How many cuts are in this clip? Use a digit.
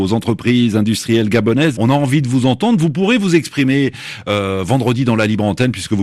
1